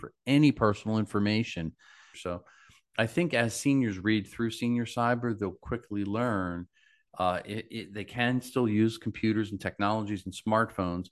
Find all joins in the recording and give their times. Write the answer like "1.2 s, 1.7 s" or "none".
2.1 s